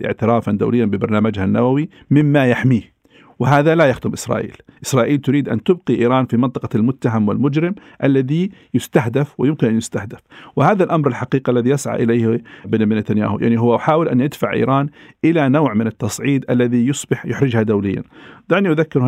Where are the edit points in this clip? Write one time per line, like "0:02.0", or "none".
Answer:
none

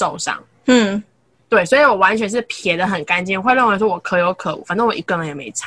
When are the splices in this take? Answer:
none

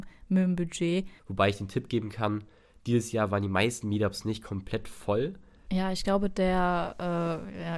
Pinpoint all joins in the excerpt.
0:01.2
0:05.7

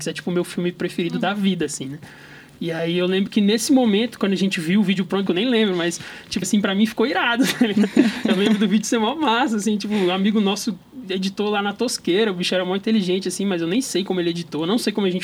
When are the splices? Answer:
0:05.3
0:06.4

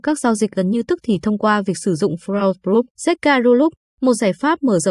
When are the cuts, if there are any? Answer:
0:02.9

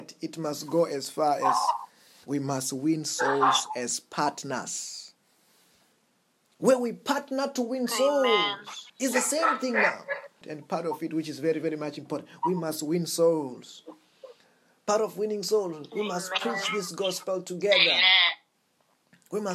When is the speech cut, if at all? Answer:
0:08.9
0:10.4

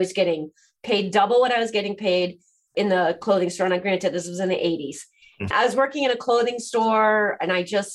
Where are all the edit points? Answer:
0:05.5

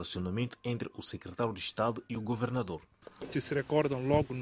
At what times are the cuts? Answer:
0:03.3

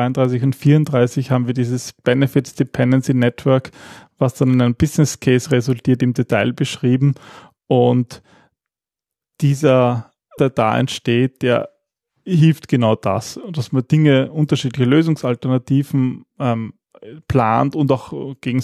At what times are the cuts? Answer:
0:10.4

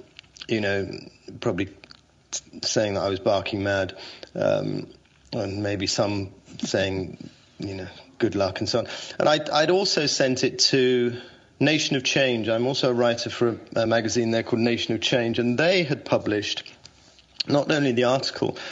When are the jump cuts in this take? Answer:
none

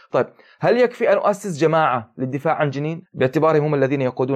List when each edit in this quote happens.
0:03.0

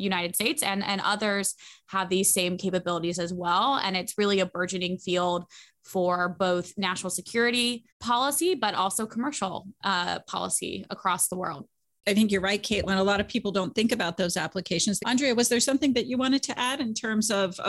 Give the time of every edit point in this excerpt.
0:07.9
0:15.0

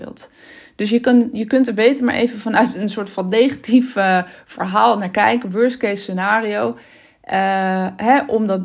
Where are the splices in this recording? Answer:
none

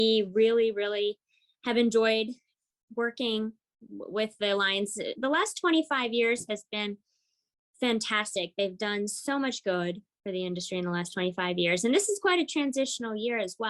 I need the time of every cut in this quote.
none

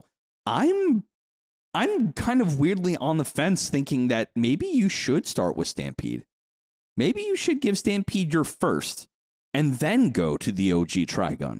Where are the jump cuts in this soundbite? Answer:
none

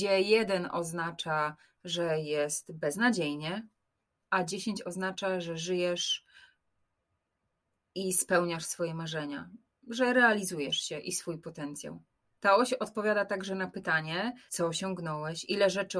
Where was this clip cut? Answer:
0:12.4
0:14.5

